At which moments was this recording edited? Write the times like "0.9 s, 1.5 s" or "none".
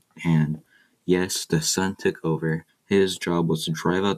2.7 s